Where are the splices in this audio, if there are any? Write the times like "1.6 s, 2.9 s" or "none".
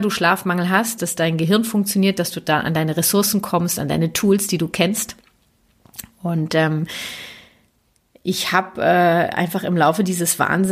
1.0 s